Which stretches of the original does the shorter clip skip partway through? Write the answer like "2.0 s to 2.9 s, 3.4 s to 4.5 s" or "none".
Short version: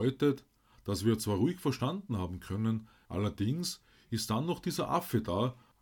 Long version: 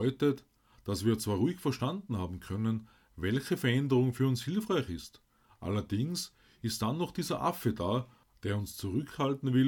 3.1 s to 5.6 s